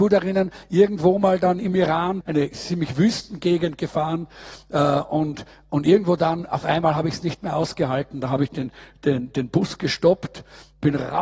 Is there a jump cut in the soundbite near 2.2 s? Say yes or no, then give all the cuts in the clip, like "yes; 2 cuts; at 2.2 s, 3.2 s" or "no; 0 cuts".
yes; 1 cut; at 2.2 s